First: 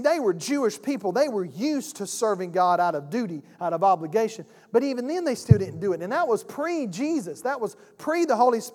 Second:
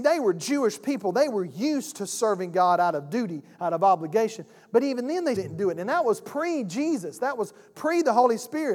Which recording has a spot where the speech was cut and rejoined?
second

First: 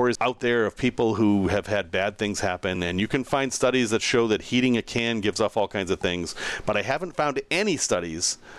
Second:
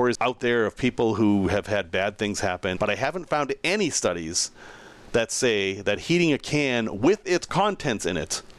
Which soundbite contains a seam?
second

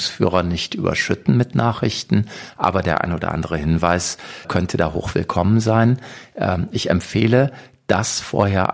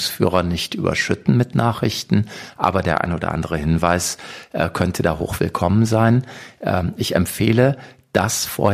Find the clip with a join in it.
first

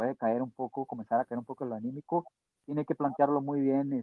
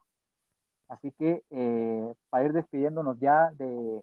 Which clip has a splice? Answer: first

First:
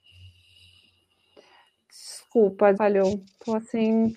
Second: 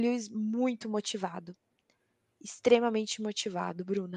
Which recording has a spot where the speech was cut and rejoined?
first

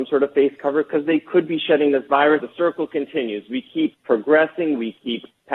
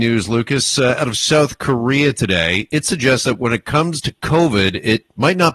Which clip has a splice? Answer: first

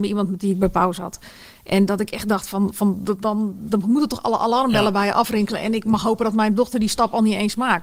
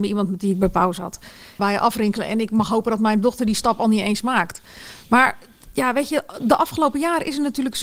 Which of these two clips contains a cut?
second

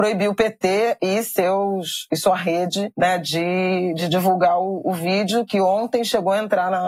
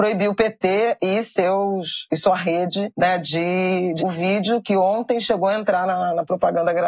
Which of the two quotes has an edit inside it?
second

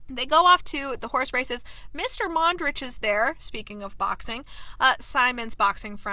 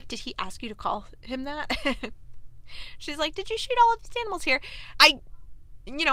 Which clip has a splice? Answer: second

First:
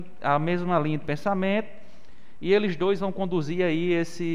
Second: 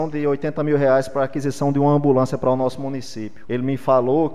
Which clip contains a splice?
second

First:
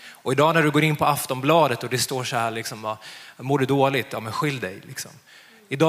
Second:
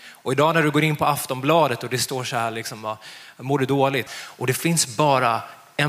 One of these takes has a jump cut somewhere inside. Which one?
second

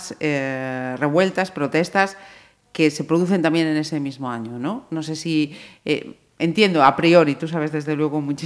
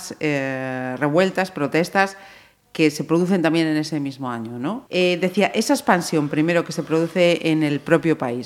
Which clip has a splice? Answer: second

